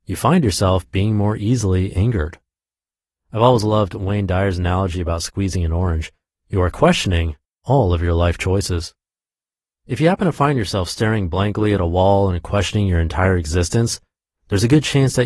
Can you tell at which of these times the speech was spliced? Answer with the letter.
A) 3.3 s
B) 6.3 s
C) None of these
B